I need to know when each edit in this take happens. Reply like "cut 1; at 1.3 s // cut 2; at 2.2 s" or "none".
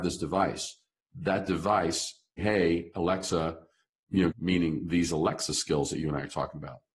cut 1; at 2.4 s // cut 2; at 4.3 s